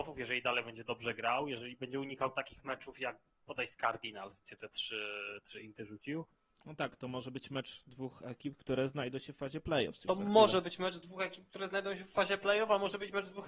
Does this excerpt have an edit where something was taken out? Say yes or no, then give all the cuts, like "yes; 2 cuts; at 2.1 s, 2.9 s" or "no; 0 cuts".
yes; 1 cut; at 4.4 s